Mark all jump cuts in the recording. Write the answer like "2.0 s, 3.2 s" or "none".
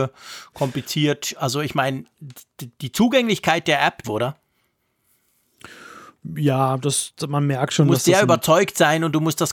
4.0 s